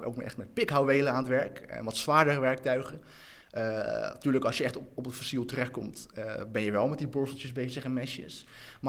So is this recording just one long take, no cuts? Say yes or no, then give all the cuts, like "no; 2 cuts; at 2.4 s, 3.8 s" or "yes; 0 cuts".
yes; 0 cuts